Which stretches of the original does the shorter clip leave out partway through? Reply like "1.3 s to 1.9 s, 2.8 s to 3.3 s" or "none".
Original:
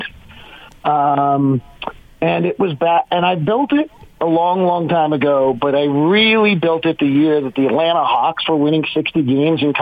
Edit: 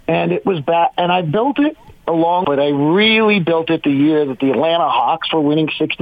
4.6 s to 5.6 s